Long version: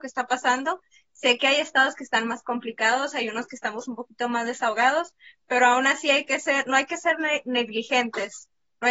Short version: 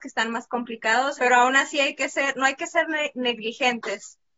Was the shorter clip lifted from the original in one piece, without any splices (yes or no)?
no